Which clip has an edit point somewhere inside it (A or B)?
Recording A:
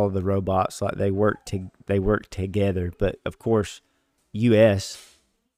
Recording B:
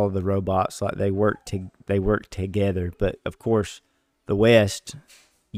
A